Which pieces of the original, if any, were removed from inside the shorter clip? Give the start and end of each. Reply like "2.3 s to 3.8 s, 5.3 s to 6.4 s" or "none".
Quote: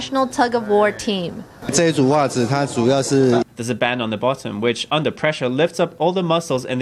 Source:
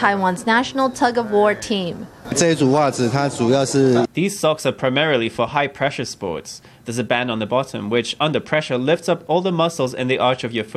4.1 s to 6.8 s